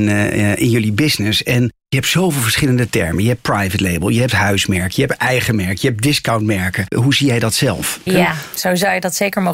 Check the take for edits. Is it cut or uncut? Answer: cut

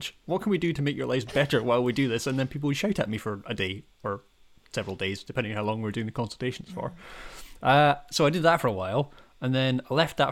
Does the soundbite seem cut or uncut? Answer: uncut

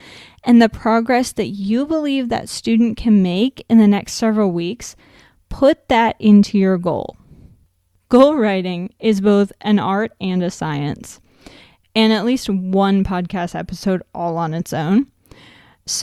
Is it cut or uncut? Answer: uncut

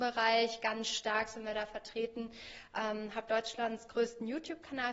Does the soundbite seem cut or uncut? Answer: uncut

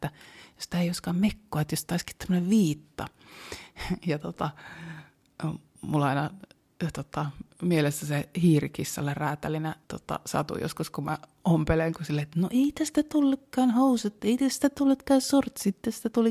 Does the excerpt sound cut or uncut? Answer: cut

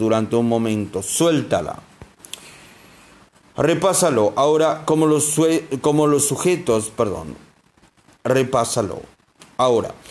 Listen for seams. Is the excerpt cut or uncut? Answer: uncut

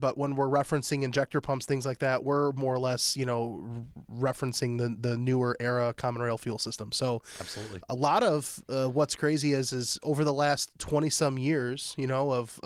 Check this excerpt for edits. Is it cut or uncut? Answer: uncut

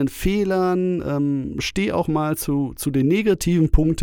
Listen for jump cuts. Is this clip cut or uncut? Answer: uncut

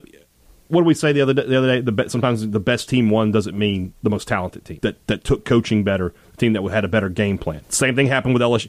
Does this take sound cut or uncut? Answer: cut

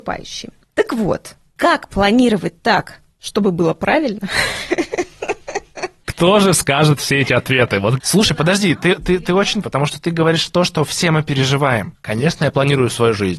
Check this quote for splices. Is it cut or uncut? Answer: cut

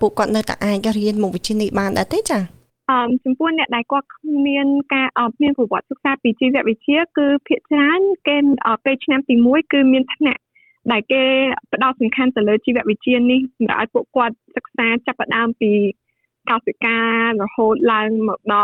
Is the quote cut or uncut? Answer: uncut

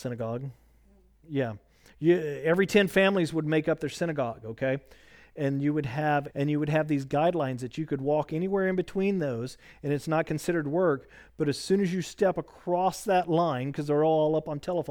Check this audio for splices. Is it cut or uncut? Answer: cut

